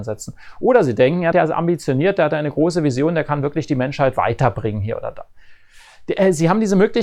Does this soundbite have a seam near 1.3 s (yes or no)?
yes